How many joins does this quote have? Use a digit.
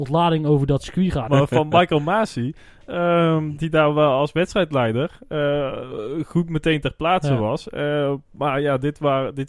1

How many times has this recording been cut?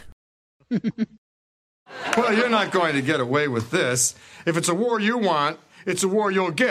0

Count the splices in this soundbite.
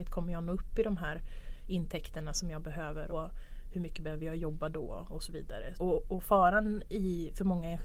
2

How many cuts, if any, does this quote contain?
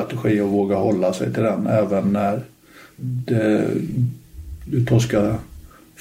1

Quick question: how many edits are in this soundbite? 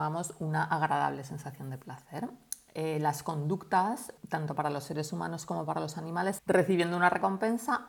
2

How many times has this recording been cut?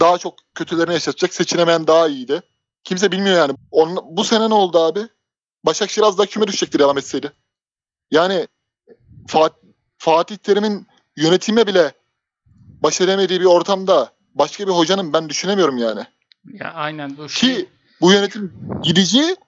1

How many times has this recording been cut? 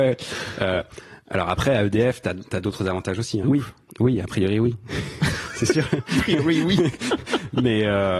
1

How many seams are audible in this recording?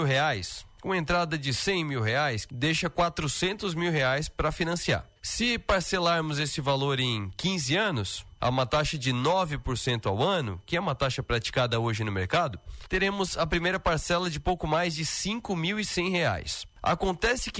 3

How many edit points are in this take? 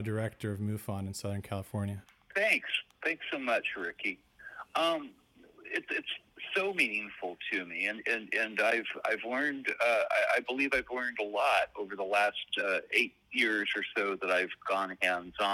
0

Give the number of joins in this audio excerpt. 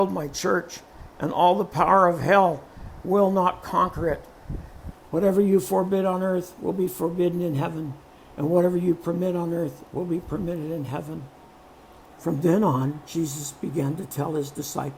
2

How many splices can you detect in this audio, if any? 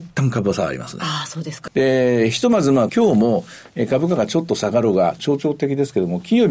3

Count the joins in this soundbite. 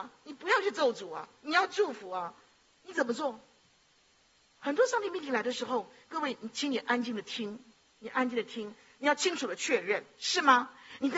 0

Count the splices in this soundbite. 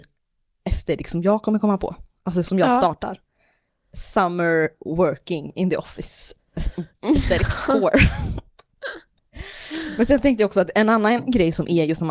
0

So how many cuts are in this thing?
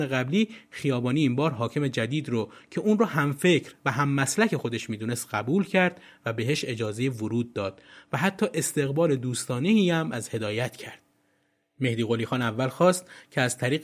0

